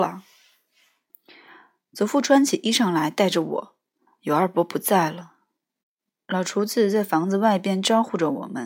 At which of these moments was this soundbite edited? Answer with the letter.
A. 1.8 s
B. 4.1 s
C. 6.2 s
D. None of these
B